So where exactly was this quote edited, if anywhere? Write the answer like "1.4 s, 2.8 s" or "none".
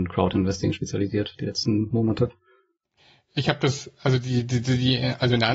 none

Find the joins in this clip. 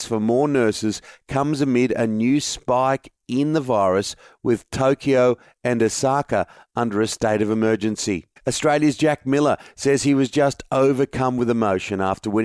8.4 s

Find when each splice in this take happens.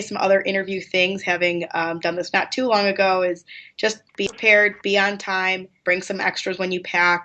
4.1 s, 5.8 s

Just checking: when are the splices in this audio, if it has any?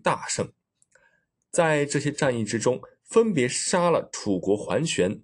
none

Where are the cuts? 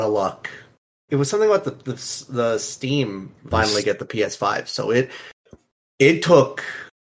1.1 s, 3.5 s

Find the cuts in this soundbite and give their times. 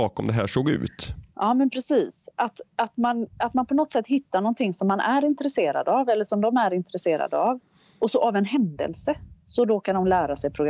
none

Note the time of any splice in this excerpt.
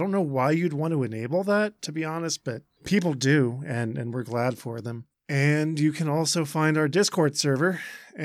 none

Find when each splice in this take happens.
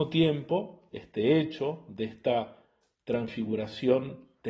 none

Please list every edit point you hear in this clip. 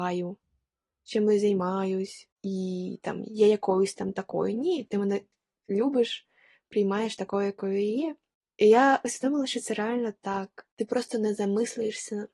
none

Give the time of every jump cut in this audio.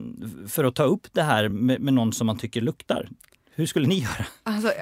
none

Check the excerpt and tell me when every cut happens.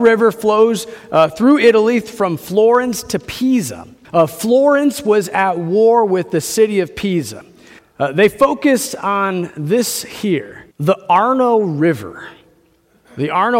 4.0 s, 7.8 s, 10.7 s

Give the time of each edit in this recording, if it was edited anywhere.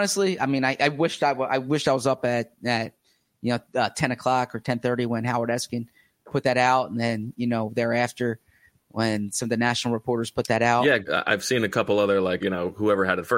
11.1 s, 12.4 s

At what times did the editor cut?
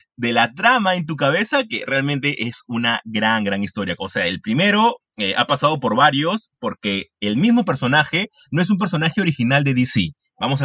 4.0 s

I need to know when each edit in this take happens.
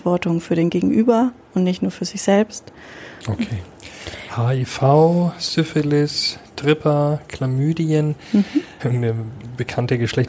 3.2 s, 8.8 s

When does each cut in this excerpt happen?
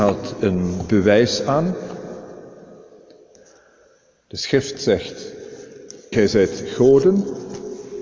6.1 s

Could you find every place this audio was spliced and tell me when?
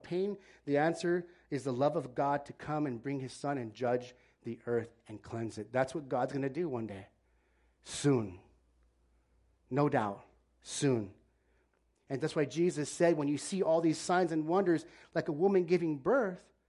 none

